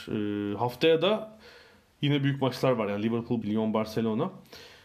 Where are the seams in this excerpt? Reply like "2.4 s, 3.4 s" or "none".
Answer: 3.4 s